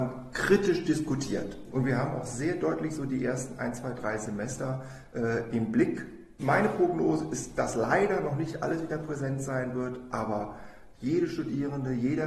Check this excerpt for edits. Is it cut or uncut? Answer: uncut